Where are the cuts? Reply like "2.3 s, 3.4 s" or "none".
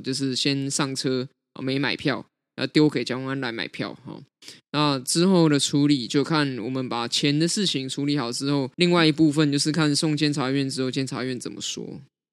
8.7 s